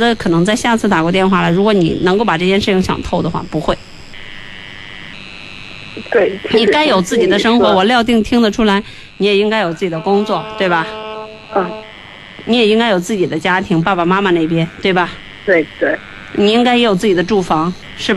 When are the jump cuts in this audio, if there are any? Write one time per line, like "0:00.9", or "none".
0:11.4